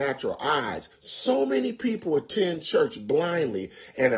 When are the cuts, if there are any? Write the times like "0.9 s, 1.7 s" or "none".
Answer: 0.9 s